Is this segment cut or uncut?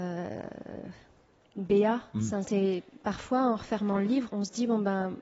cut